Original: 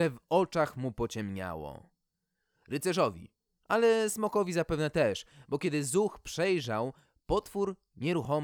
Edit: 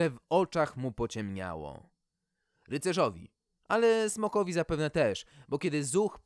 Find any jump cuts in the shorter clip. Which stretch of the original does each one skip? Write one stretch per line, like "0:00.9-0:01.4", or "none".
none